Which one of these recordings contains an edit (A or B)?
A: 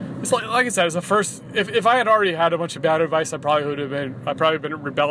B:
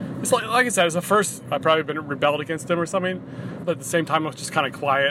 B